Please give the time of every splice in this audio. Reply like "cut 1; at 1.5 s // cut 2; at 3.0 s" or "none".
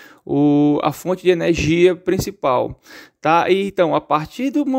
none